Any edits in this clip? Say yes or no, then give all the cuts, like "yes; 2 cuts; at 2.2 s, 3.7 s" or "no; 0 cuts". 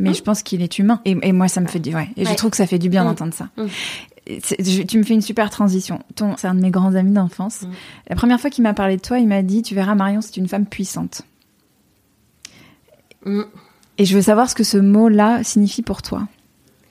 yes; 2 cuts; at 1.0 s, 6.4 s